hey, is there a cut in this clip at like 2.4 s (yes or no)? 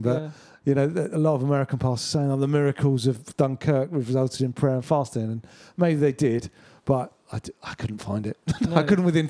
no